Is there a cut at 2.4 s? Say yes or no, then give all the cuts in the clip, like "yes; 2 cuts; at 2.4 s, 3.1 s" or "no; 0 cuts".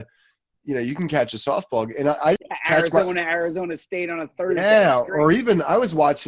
yes; 1 cut; at 2.4 s